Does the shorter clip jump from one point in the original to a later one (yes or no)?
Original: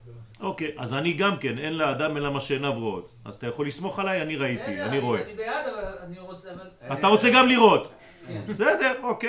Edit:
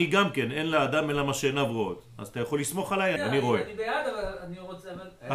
yes